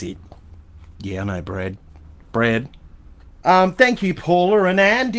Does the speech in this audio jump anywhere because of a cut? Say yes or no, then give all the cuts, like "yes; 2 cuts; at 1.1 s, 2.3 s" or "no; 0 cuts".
yes; 1 cut; at 3.4 s